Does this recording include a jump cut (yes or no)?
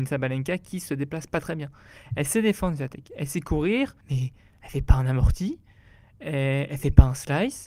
yes